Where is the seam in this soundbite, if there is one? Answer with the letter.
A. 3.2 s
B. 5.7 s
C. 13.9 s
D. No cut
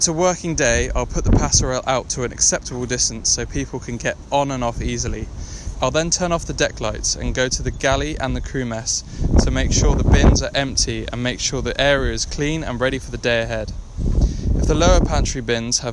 B